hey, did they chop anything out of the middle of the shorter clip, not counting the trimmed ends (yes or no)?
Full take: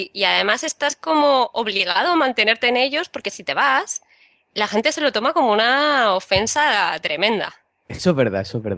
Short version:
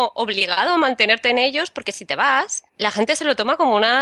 yes